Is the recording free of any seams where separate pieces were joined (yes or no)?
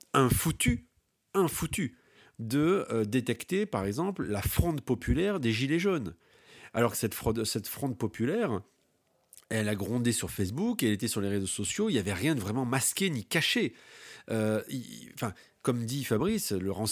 yes